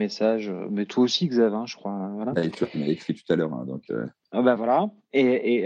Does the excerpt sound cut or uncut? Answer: uncut